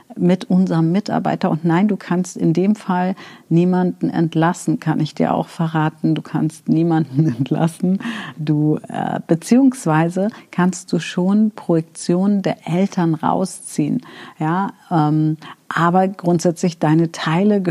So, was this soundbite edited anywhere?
no; 0 cuts

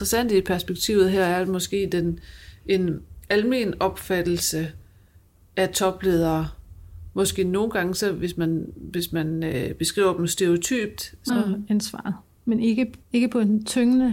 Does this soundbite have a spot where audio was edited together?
yes; 2 cuts; at 11.3 s, 13.0 s

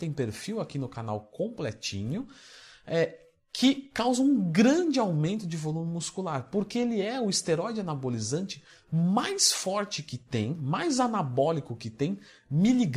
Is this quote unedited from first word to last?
yes; 0 cuts

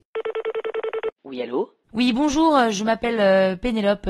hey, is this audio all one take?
yes; 0 cuts

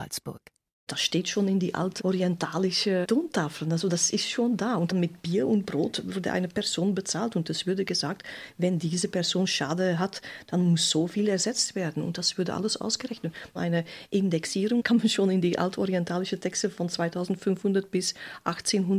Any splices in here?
no; 0 cuts

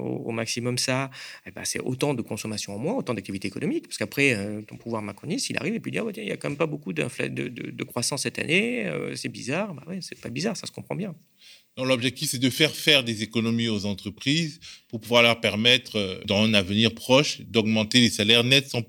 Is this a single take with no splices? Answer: yes; 0 cuts

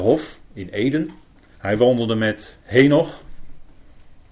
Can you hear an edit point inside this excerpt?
yes; 2 cuts; at 1.6 s, 2.6 s

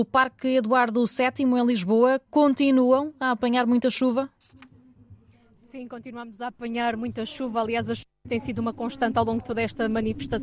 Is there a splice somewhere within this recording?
no; 0 cuts

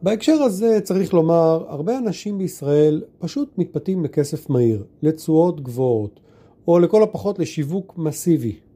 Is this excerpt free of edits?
yes; 0 cuts

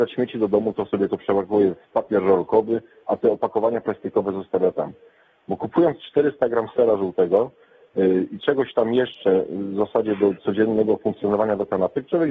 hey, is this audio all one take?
yes; 0 cuts

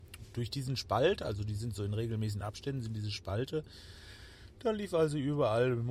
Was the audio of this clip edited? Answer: no; 0 cuts

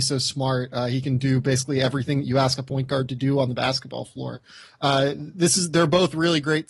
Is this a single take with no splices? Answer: yes; 0 cuts

